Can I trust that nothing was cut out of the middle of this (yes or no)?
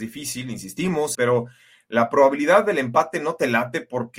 no